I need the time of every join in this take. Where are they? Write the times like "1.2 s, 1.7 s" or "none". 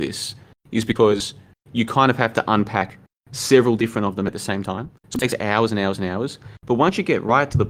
none